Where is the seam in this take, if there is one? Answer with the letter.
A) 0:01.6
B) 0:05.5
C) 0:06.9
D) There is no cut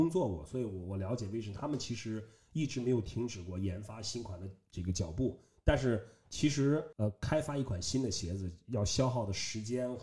C